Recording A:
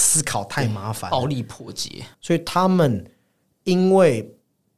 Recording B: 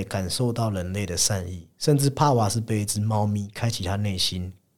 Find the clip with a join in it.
A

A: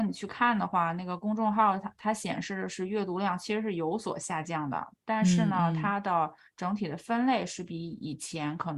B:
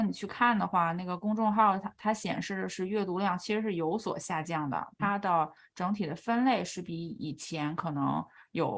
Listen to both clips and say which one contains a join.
B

